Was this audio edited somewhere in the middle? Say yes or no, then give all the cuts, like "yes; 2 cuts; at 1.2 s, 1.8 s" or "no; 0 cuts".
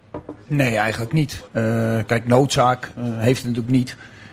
yes; 2 cuts; at 1.5 s, 3.0 s